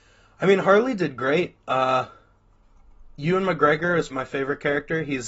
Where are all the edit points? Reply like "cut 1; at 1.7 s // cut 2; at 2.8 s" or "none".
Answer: cut 1; at 1.6 s // cut 2; at 4.1 s